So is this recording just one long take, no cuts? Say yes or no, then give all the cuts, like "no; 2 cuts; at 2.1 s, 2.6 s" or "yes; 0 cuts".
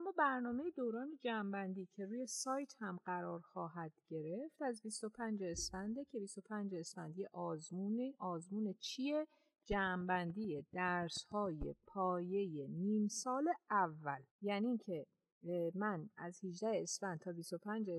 no; 1 cut; at 14.3 s